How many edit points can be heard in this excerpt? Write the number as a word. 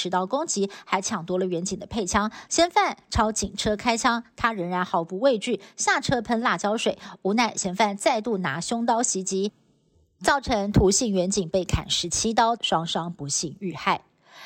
two